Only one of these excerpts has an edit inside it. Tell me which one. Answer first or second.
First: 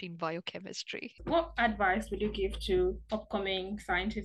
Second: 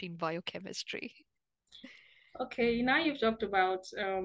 first